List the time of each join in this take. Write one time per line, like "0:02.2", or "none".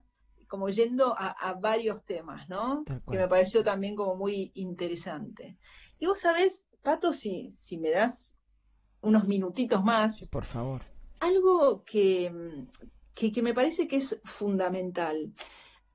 0:11.2
0:13.3

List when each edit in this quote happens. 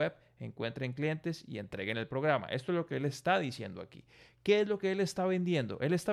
none

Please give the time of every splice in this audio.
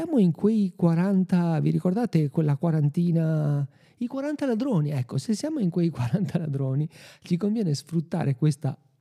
none

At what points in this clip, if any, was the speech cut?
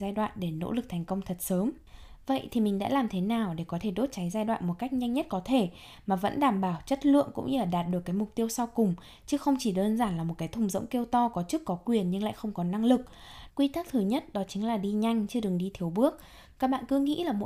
0:13.5

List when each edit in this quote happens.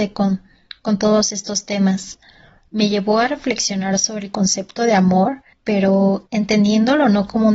0:02.7
0:05.5

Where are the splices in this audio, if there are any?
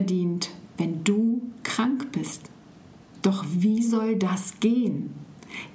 0:03.1

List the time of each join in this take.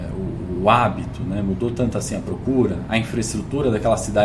none

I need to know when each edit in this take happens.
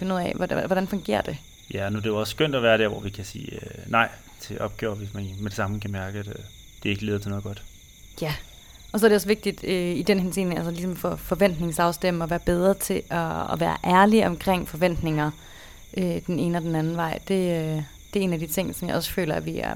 none

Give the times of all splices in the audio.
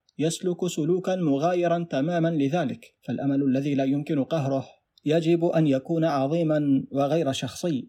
0:03.0

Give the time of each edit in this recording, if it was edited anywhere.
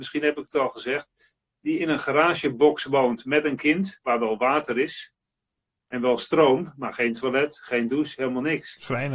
none

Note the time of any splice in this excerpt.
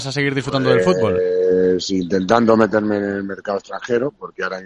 none

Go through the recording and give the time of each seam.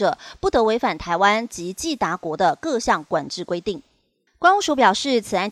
0:04.3

